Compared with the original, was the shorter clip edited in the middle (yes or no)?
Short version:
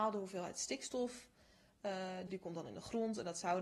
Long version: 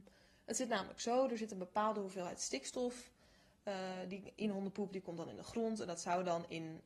yes